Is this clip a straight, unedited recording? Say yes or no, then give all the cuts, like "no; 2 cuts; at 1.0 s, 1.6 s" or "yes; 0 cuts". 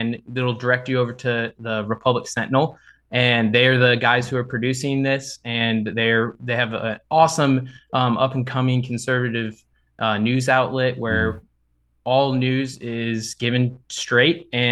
yes; 0 cuts